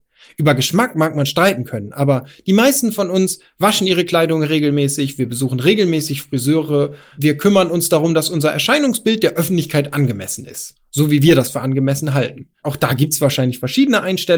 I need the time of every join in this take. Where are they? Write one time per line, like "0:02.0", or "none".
none